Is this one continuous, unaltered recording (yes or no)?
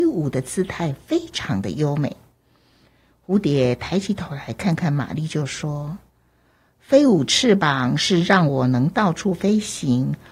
yes